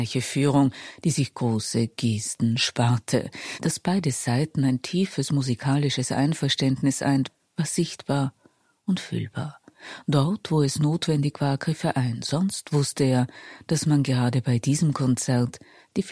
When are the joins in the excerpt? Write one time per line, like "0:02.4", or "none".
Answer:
none